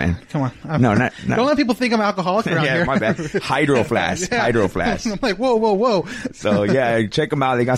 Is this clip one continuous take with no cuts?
yes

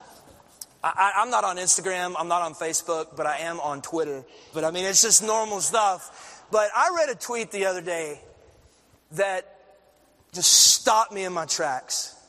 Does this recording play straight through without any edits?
no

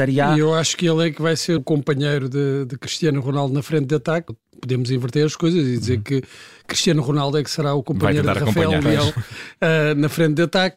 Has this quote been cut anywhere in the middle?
yes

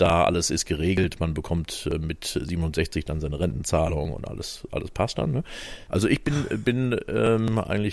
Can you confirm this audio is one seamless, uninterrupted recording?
no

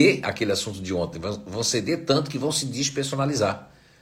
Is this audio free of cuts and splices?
yes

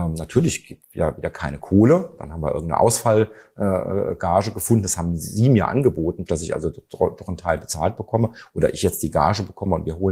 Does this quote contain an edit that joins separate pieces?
yes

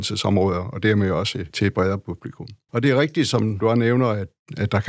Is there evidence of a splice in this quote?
yes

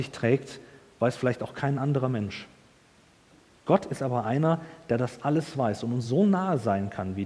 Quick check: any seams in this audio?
no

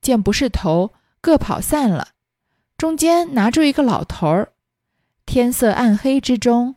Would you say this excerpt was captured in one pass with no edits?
yes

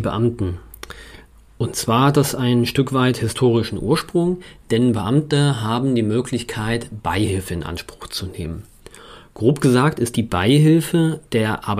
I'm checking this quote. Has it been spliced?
no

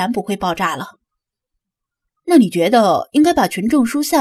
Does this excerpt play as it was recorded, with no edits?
no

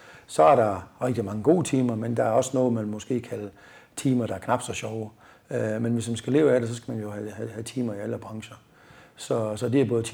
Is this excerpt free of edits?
yes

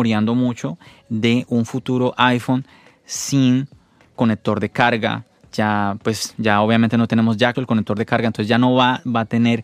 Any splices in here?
yes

